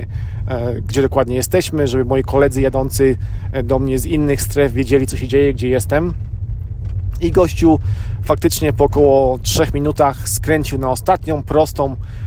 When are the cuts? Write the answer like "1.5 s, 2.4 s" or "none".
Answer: none